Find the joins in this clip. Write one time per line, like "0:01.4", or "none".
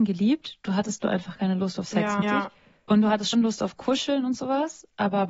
0:02.2
0:03.3